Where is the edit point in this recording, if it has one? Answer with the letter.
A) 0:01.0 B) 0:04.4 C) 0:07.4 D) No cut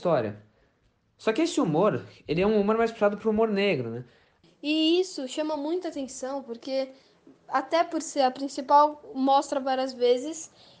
B